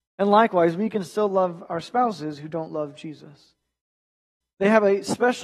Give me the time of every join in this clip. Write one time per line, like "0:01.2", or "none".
0:04.4